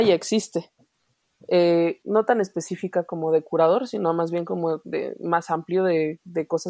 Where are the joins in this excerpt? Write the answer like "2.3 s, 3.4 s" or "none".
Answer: 2.0 s, 4.8 s

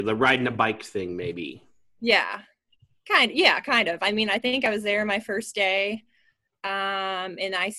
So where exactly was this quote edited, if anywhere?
none

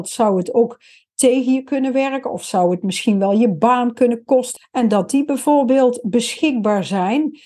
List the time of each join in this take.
4.6 s

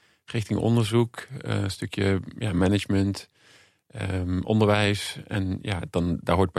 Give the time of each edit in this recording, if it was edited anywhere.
none

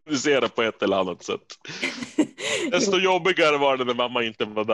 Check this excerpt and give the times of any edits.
none

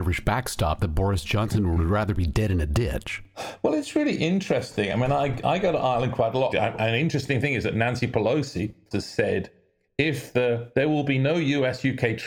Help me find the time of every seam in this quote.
6.5 s, 8.9 s

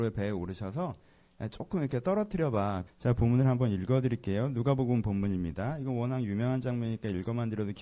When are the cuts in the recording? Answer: 2.9 s

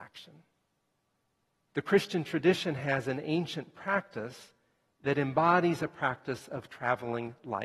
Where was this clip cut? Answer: 1.7 s

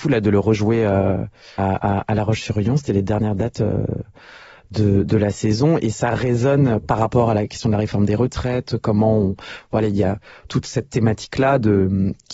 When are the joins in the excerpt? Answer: 1.6 s

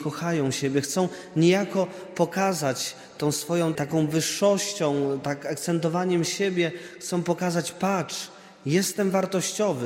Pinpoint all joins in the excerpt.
3.8 s

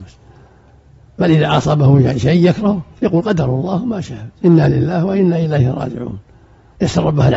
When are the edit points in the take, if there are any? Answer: 2.9 s, 4.4 s

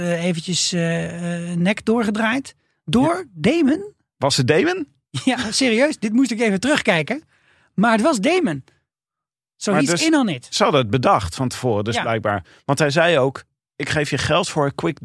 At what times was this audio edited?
13.6 s

